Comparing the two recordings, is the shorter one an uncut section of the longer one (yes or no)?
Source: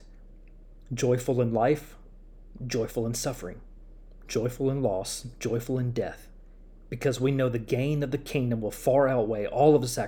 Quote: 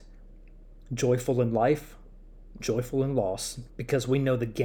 no